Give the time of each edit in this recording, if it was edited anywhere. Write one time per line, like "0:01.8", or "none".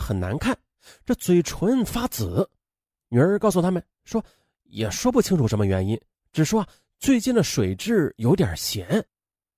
none